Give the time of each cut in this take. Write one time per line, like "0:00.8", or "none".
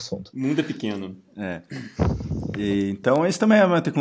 none